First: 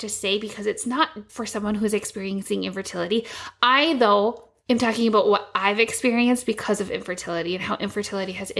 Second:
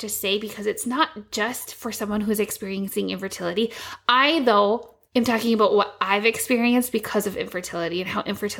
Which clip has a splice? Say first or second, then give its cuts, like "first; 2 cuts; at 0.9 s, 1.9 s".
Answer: first; 1 cut; at 1.3 s